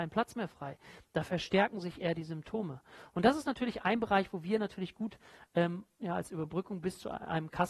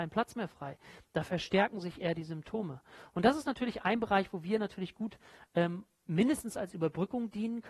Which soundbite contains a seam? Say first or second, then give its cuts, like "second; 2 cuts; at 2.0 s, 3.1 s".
first; 1 cut; at 6.0 s